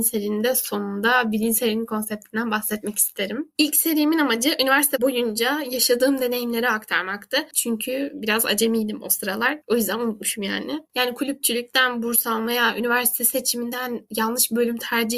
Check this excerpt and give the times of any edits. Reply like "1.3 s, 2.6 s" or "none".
7.5 s, 10.9 s

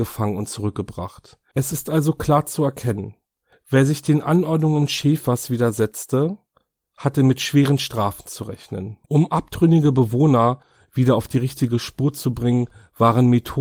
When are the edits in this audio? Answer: 1.5 s, 9.0 s

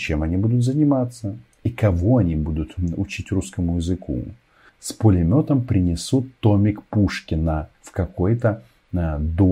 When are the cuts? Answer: 4.7 s, 7.7 s

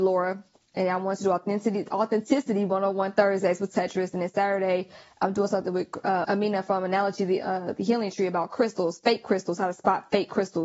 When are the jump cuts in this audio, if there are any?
6.2 s

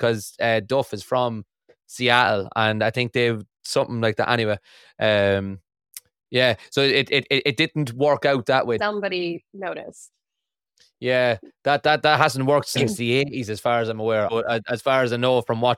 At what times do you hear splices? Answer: 8.8 s, 14.3 s

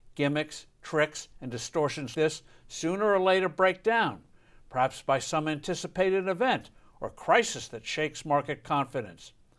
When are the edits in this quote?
2.1 s

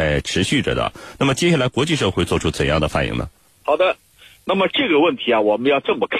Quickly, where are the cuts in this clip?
2.1 s

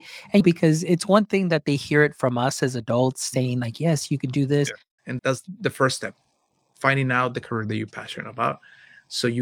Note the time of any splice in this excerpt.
5.0 s

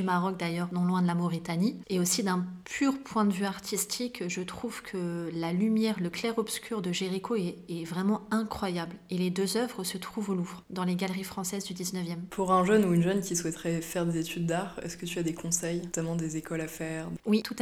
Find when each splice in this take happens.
none

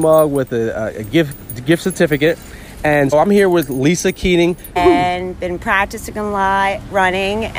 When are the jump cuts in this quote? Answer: 3.1 s, 4.8 s

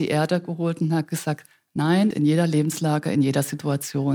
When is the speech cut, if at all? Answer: 2.1 s

